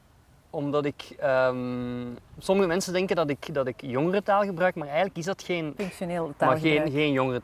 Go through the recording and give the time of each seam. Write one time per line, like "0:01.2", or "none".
0:05.8